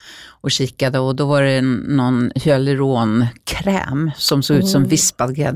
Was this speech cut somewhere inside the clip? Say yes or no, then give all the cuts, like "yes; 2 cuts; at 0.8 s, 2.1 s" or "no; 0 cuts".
no; 0 cuts